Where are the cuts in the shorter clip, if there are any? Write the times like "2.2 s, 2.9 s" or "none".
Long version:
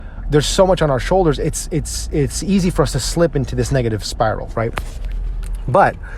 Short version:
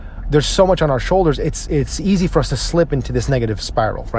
1.7 s

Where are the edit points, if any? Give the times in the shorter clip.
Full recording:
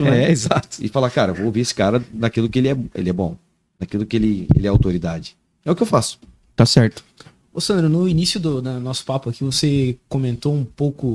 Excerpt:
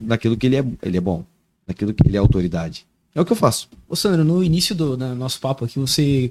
2.0 s, 3.8 s

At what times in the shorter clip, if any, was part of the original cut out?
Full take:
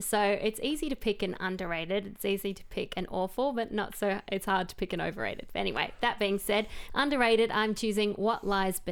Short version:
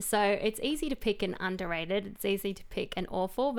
none

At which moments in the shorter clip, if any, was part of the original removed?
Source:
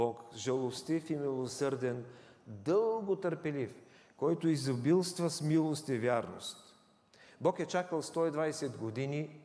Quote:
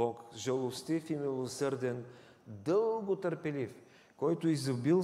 none

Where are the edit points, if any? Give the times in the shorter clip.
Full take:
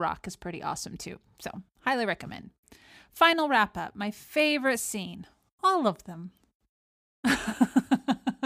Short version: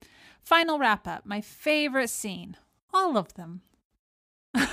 none

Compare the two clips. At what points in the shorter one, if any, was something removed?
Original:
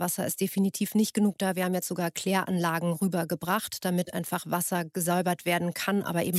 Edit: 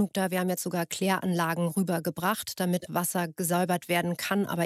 2.9 s

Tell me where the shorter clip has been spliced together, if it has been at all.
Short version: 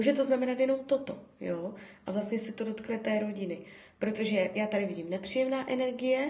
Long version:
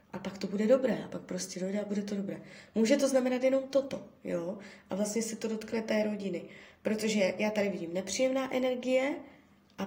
none

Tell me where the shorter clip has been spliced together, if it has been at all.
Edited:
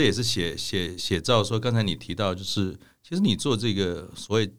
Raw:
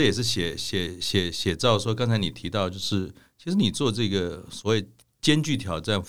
1.0 s

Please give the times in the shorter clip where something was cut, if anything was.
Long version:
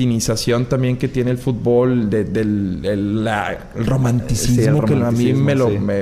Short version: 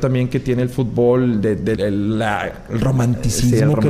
1.7 s

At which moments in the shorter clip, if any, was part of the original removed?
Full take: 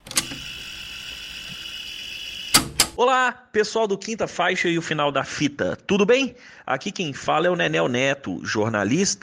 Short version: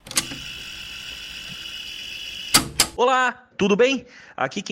3.5 s

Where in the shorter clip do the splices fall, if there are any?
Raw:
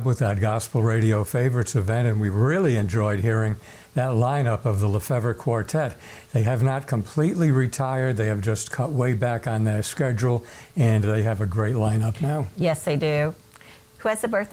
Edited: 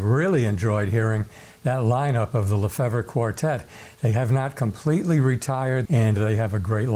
5.9 s

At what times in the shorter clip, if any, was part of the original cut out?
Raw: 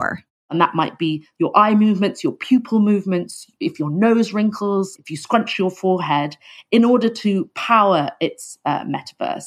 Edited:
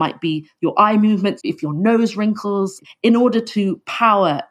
1.4 s, 2.8 s

